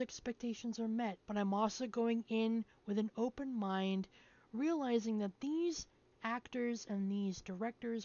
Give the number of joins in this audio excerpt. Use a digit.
1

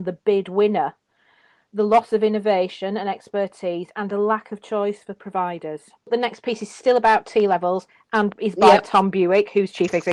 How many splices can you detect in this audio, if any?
0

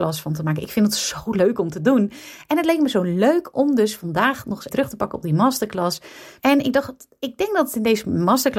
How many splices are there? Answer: 2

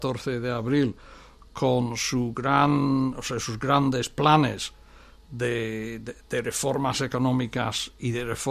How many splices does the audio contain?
0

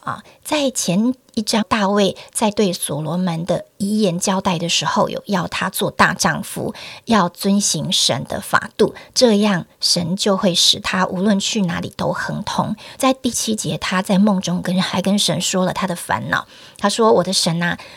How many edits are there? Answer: 2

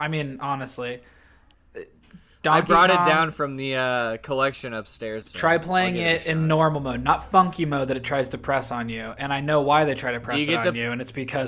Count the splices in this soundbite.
1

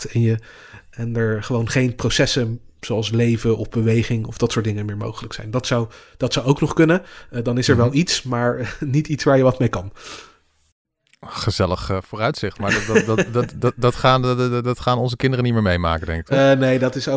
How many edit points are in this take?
0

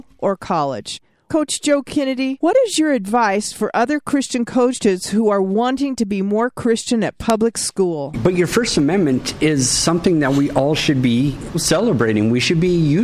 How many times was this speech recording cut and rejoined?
1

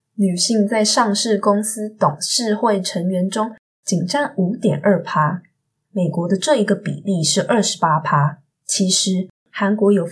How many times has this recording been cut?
2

